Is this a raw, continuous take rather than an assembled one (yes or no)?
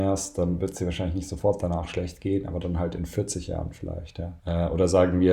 no